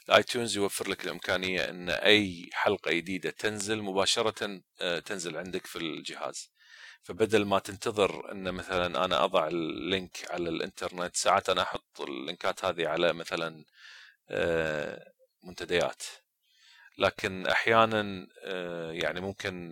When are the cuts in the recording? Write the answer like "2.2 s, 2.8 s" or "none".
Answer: none

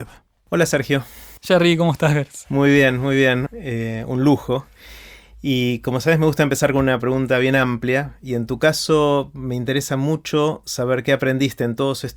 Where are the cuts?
3.5 s

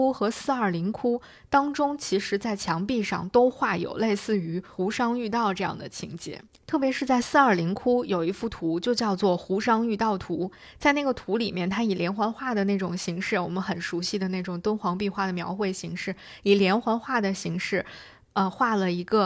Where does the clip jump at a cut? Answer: none

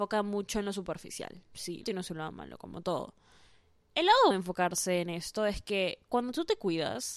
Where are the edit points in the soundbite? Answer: 1.8 s, 4.3 s

